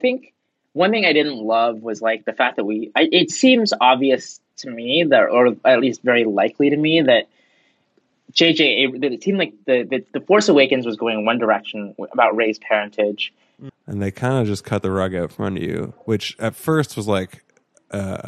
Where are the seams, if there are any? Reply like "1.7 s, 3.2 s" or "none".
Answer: 13.7 s